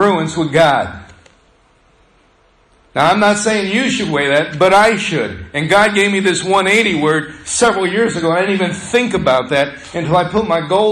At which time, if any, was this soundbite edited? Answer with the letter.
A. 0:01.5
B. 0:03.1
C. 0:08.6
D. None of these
D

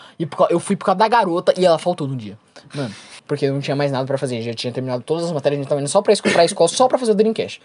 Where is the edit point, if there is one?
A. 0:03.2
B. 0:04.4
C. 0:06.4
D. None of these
A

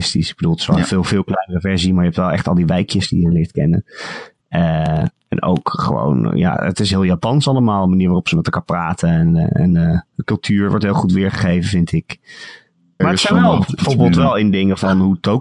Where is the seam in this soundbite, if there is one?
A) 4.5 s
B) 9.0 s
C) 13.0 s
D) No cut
C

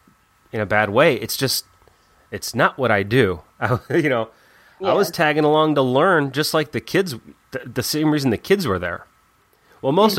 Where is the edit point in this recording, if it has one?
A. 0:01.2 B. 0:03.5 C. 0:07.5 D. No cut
C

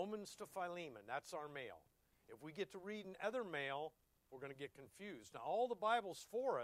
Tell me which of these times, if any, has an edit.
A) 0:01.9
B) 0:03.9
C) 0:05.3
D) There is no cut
D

